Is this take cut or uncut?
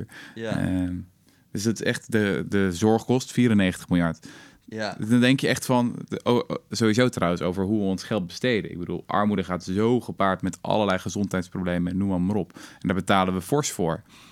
uncut